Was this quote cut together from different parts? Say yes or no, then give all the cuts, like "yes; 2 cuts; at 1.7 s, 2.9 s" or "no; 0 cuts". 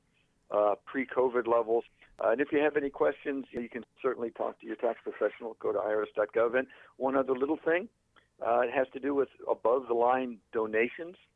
no; 0 cuts